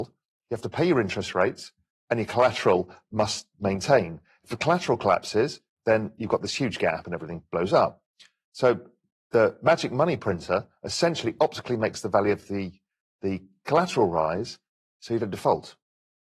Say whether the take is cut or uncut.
uncut